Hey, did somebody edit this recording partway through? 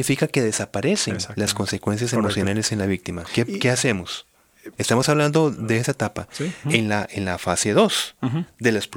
yes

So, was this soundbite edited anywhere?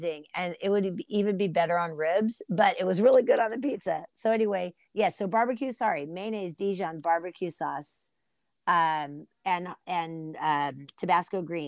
no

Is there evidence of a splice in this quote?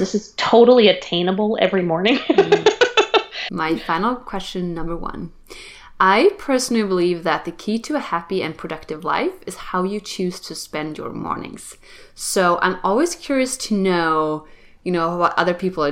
yes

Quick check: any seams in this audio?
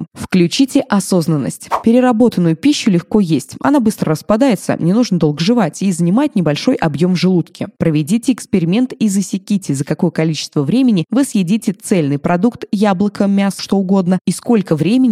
yes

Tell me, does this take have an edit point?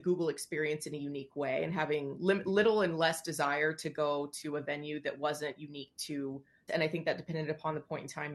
yes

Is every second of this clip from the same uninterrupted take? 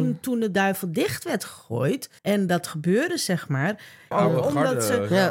no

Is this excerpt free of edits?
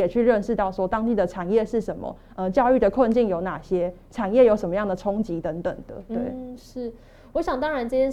yes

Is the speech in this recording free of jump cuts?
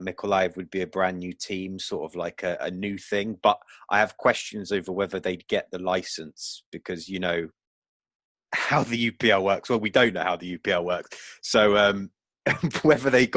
yes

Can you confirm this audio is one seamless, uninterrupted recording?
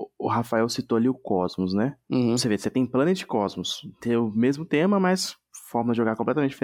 yes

